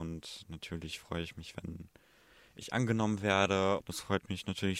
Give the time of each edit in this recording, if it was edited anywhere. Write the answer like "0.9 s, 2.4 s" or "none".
3.8 s